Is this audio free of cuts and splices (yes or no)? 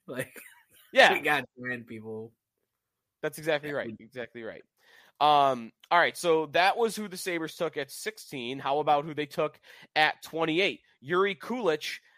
yes